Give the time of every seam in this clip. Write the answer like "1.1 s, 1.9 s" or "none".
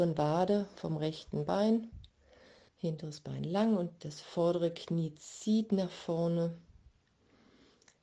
2.7 s